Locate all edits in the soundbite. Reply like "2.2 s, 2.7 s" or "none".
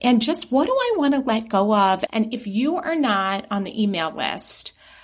2.1 s